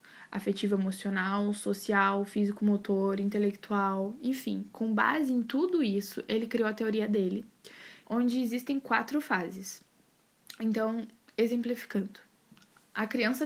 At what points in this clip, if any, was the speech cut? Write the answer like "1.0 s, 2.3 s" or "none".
8.0 s